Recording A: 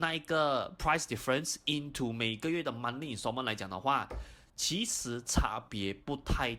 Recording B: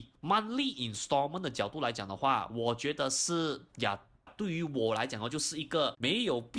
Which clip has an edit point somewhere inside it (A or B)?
B